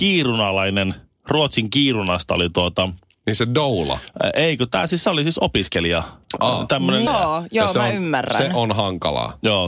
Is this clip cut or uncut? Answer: cut